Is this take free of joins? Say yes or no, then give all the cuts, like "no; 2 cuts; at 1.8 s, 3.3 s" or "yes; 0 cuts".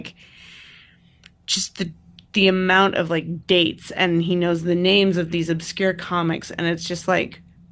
yes; 0 cuts